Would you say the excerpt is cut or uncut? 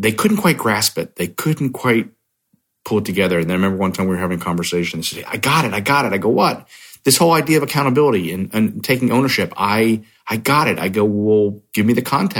uncut